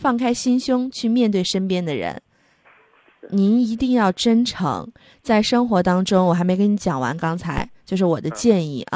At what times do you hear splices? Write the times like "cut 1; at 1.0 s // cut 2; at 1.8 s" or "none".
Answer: cut 1; at 3.2 s